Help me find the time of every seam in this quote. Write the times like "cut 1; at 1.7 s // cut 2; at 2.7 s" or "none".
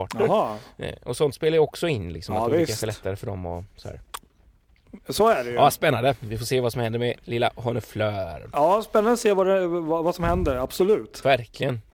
none